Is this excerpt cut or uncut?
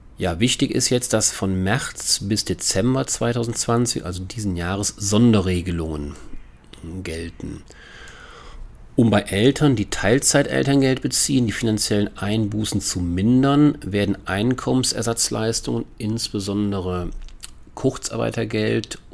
uncut